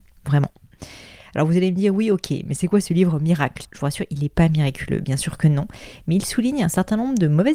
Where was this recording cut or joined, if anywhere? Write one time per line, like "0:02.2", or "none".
0:03.6